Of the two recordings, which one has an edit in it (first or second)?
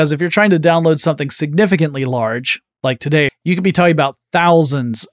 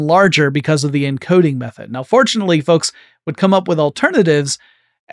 first